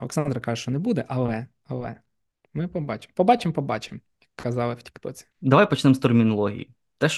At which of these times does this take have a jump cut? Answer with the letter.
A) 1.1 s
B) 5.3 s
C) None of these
B